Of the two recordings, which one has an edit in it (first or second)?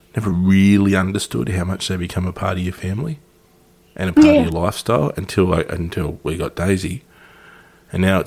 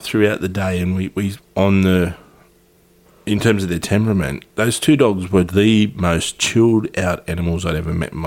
second